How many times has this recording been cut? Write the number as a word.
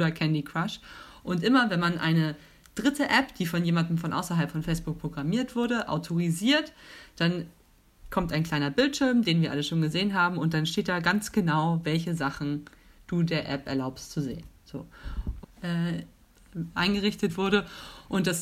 one